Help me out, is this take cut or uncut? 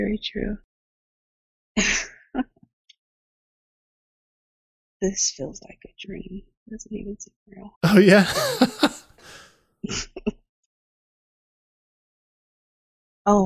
cut